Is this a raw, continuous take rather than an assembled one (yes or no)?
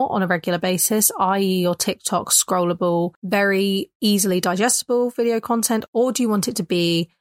yes